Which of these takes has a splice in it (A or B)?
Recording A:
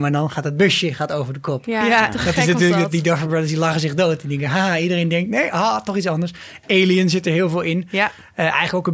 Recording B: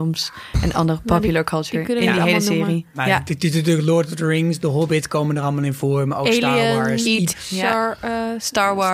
B